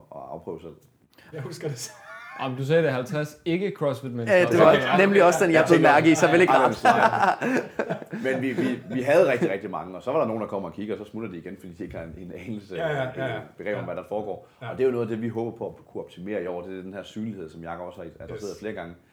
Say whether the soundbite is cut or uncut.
cut